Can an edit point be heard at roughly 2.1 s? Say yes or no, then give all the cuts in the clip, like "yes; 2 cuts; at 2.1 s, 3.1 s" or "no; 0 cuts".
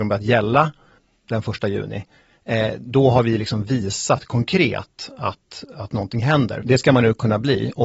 no; 1 cut; at 6.6 s